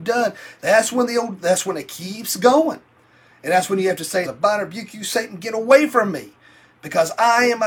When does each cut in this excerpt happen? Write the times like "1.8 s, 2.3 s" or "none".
4.2 s